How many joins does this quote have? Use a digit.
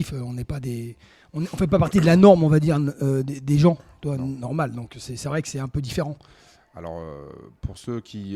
0